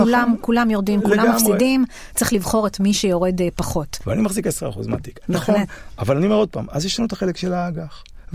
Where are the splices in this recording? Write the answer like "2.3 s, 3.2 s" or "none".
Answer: 4.0 s, 5.2 s